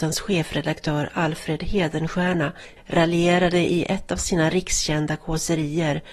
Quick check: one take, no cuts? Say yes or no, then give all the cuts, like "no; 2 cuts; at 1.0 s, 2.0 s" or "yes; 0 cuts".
no; 1 cut; at 2.8 s